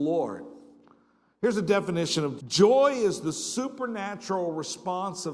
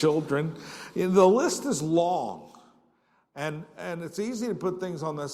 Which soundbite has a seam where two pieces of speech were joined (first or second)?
first